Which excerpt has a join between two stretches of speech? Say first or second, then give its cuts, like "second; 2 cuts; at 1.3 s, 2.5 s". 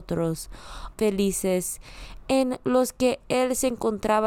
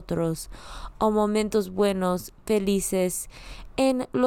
first; 1 cut; at 0.9 s